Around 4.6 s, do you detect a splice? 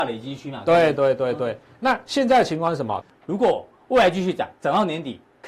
no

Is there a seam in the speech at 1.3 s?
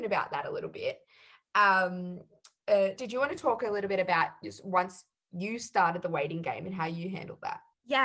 no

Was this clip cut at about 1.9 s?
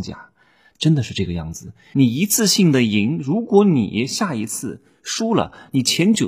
yes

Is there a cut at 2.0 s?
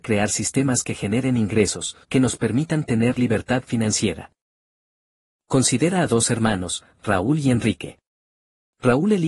yes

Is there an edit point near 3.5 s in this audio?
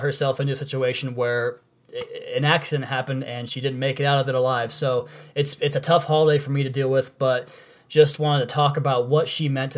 yes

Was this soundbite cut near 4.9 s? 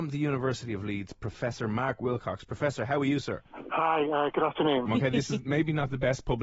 yes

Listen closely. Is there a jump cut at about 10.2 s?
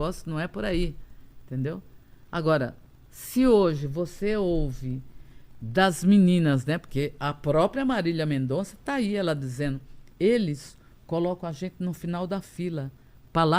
yes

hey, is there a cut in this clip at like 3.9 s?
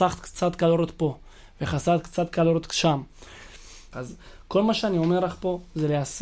yes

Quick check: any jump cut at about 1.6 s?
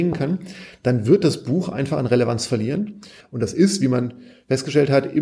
no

